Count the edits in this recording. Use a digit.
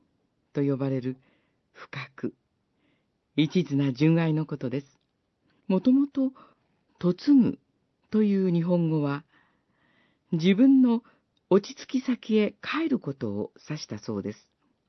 1